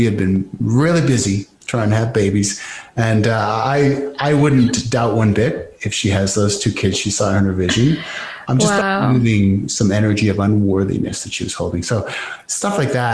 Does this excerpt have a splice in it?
no; 0 cuts

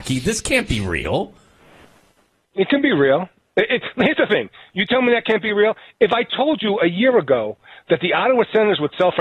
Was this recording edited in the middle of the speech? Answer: no; 0 cuts

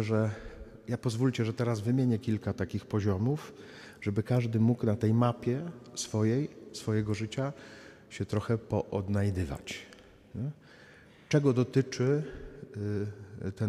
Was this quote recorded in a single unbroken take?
yes; 0 cuts

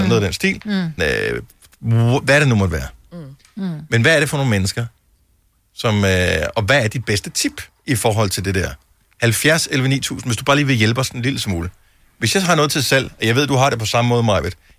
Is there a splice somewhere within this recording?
yes; 1 cut; at 1.0 s

